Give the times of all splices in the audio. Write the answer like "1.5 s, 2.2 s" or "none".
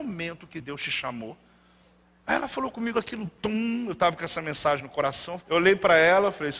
2.9 s, 5.4 s